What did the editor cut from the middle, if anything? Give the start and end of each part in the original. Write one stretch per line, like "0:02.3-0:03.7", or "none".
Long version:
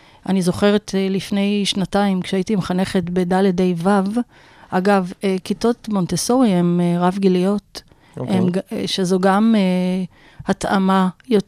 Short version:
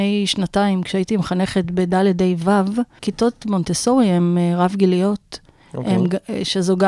0:04.4-0:05.4